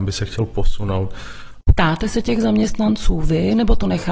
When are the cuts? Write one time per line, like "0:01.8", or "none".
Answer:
0:01.6